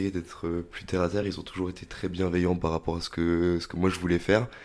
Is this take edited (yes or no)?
no